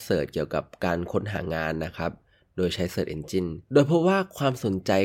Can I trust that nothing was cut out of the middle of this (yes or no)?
no